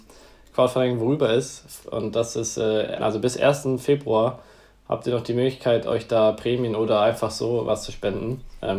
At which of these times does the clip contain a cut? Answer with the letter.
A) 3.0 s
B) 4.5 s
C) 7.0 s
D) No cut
A